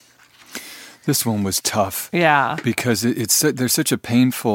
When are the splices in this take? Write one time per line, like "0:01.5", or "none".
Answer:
none